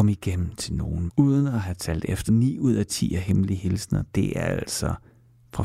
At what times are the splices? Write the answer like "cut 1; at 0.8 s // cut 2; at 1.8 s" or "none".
cut 1; at 1.1 s // cut 2; at 2.3 s